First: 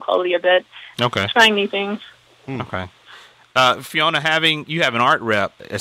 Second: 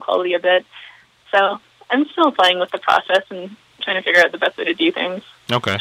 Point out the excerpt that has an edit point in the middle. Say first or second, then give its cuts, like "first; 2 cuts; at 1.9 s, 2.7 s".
first; 1 cut; at 0.9 s